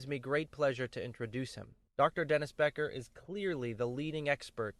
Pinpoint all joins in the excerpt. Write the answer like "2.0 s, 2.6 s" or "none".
1.9 s